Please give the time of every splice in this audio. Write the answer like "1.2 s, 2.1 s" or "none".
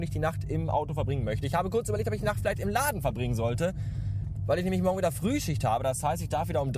none